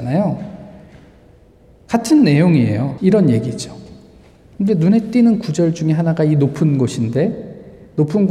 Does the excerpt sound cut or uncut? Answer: cut